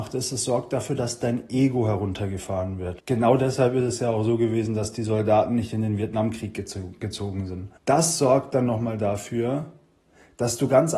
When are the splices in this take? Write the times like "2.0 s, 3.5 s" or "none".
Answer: 3.0 s, 7.8 s